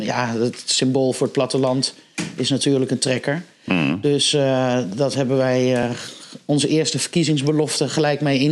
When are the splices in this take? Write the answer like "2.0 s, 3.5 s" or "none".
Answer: none